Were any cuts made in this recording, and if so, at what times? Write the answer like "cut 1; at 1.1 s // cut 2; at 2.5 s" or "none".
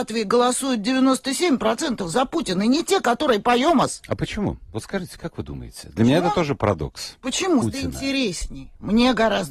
cut 1; at 7.6 s